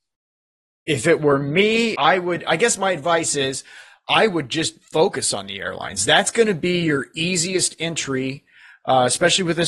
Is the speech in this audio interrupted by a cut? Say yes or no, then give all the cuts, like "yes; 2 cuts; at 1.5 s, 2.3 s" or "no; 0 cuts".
yes; 1 cut; at 1.9 s